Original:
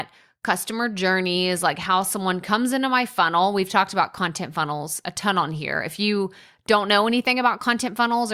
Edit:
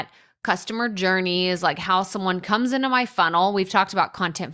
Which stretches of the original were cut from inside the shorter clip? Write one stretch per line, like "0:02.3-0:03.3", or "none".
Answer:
none